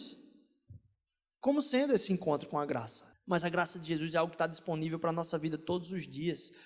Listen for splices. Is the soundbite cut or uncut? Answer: cut